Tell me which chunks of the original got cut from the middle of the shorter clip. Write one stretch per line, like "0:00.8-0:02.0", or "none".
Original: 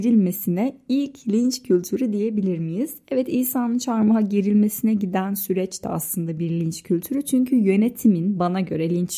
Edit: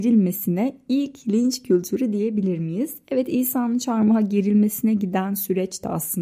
none